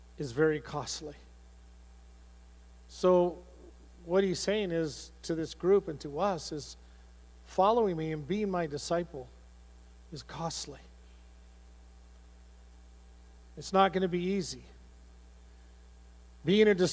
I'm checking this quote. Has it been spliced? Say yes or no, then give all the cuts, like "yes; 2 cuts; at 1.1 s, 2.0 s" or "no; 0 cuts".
no; 0 cuts